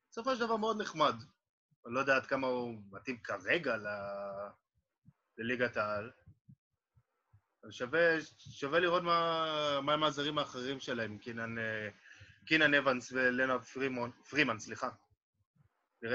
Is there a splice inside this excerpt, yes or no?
no